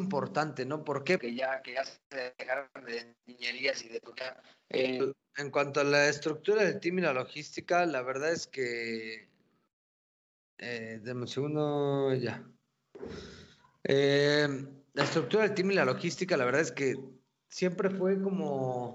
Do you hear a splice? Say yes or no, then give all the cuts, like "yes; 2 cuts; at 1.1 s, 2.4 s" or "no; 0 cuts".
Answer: yes; 1 cut; at 1.2 s